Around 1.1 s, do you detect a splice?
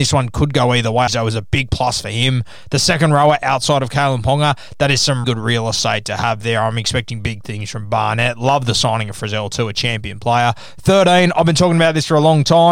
yes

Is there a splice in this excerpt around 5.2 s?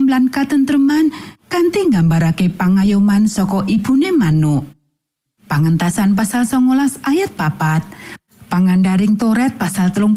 yes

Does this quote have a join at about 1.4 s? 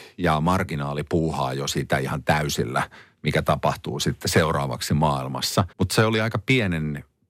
no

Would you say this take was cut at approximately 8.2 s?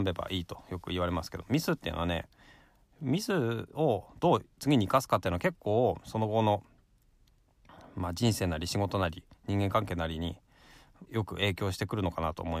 no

